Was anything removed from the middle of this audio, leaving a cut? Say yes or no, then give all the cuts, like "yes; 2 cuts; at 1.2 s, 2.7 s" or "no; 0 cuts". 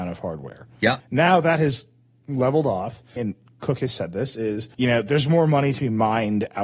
yes; 3 cuts; at 1.0 s, 3.2 s, 4.7 s